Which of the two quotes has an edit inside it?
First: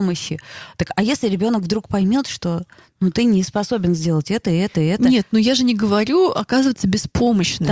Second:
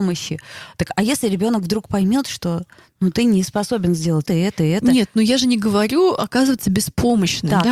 second; 1 cut; at 4.3 s

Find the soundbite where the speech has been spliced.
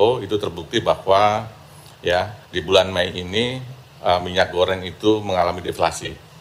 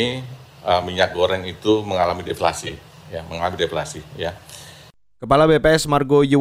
first; 1 cut; at 2.4 s

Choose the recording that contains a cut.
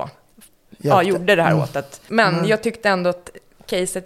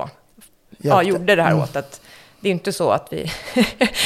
first; 1 cut; at 2.1 s

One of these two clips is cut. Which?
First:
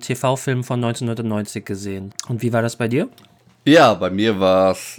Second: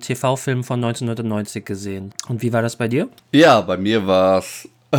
second; 1 cut; at 3.2 s

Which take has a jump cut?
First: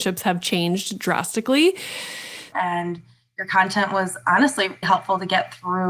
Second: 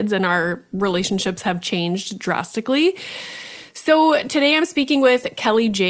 first; 2 cuts; at 2.5 s, 4.8 s

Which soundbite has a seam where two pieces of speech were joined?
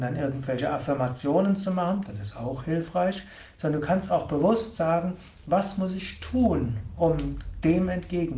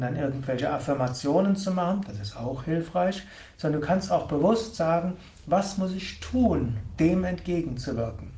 second; 1 cut; at 7.0 s

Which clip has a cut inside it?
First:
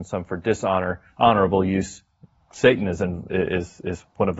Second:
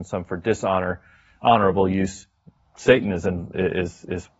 first; 1 cut; at 1.1 s

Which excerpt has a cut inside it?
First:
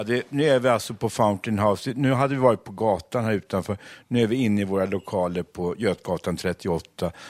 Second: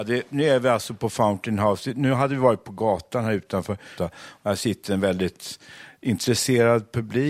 second; 1 cut; at 4.0 s

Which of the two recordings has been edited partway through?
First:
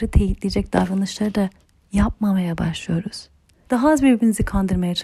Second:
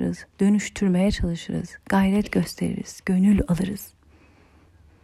first; 1 cut; at 3.6 s

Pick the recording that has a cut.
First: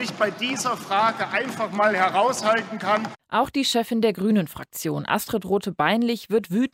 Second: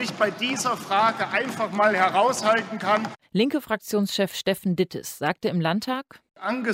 second; 1 cut; at 3.2 s

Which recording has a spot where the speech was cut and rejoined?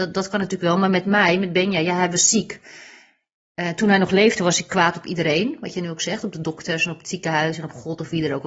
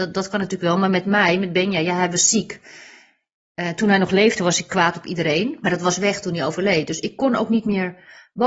second; 1 cut; at 5.6 s

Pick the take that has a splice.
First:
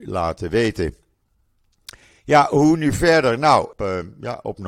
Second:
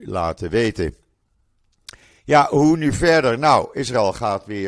first; 1 cut; at 3.7 s

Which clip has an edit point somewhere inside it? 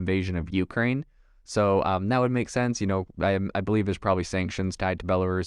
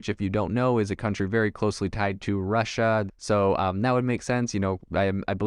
second; 1 cut; at 3.1 s

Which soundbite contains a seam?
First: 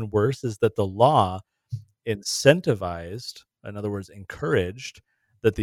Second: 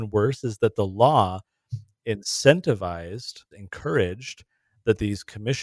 second; 1 cut; at 3.5 s

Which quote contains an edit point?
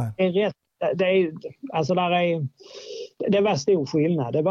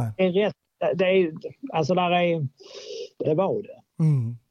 second; 1 cut; at 3.2 s

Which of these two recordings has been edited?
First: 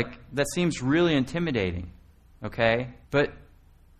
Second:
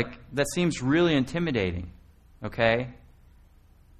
first; 1 cut; at 3.0 s

